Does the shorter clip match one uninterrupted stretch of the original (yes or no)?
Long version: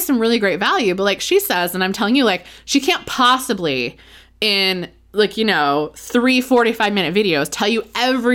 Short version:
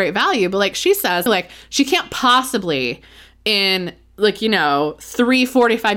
no